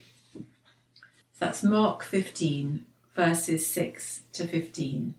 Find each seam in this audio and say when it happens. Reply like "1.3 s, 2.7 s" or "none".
1.2 s